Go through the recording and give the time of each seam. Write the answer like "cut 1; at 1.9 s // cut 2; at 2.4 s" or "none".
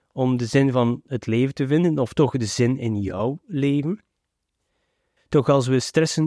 cut 1; at 5.2 s

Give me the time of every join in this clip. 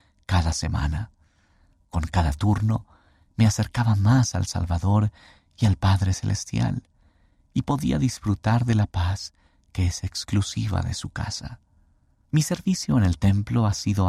cut 1; at 12.2 s

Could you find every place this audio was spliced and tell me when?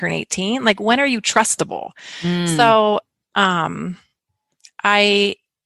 none

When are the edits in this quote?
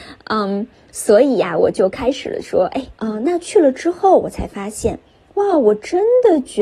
cut 1; at 3.0 s

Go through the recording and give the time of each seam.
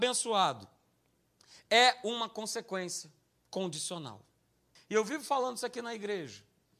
cut 1; at 4.8 s

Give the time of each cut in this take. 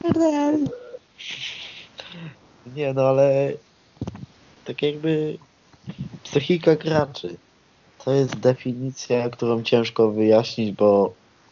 none

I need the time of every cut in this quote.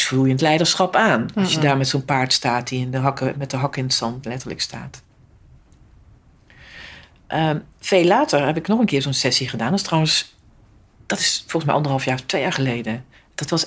none

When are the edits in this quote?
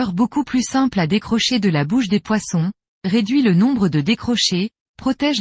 none

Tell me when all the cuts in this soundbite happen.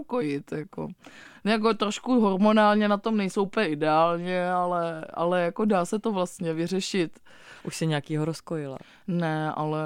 cut 1; at 7.6 s

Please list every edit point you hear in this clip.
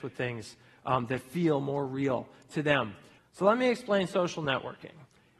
cut 1; at 3.2 s

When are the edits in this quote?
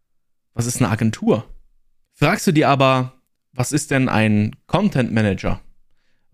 cut 1; at 2.0 s

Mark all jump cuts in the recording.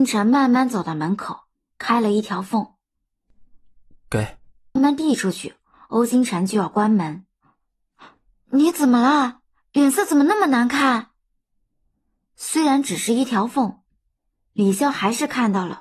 cut 1; at 4.8 s

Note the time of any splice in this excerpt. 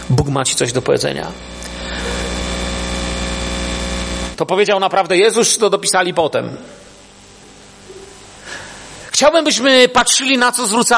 cut 1; at 4.3 s

